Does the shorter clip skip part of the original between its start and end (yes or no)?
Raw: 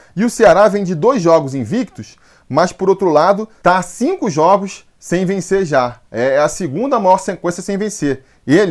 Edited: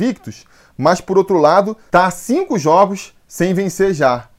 no